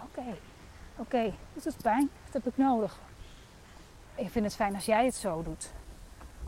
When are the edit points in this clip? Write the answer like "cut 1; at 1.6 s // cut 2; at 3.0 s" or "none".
cut 1; at 2.2 s // cut 2; at 4.2 s